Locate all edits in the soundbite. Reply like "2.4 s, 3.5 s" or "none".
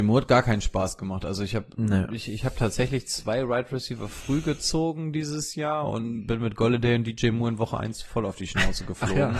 none